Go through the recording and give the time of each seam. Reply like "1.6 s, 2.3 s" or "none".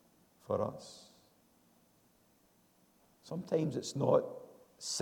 none